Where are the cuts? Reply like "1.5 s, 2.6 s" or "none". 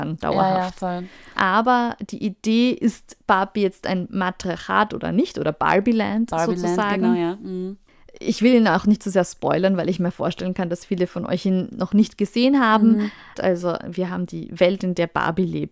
1.3 s, 13.3 s, 14.8 s